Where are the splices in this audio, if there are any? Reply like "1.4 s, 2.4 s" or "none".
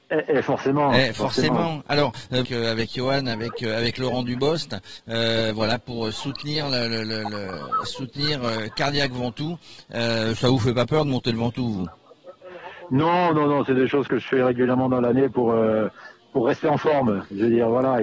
2.5 s